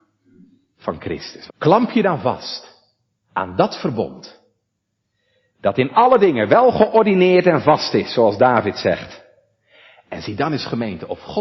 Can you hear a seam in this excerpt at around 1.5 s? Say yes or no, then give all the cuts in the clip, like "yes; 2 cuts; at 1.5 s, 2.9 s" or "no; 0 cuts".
yes; 1 cut; at 1.5 s